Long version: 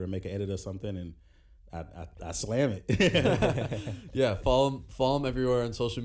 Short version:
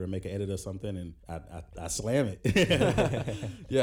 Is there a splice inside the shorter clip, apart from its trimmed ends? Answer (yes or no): yes